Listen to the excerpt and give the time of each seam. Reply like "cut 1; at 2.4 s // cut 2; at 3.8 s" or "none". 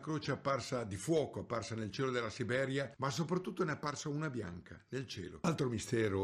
cut 1; at 3.0 s